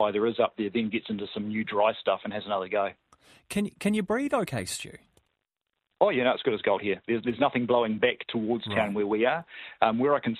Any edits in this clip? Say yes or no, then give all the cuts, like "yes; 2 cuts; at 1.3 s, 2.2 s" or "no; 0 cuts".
no; 0 cuts